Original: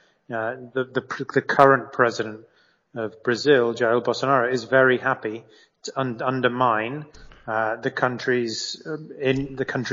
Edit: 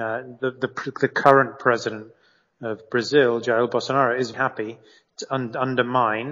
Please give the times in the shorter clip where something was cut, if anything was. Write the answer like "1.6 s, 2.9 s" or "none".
4.3 s